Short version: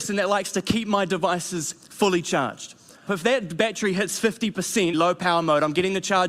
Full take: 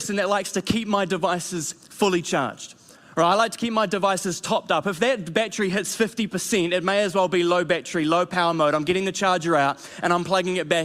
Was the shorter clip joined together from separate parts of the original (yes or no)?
yes